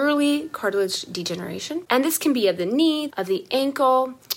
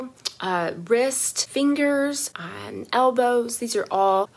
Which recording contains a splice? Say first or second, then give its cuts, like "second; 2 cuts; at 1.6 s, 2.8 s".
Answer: first; 2 cuts; at 1.9 s, 3.1 s